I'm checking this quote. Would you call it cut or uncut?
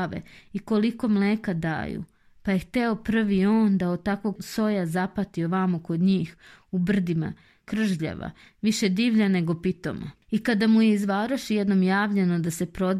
cut